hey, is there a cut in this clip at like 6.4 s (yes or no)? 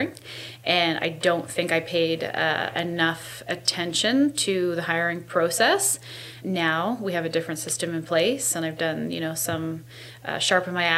yes